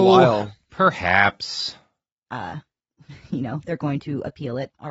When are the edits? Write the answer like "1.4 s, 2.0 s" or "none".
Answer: 2.3 s